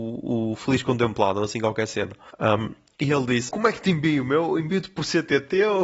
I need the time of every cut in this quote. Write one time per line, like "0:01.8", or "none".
0:02.3
0:03.5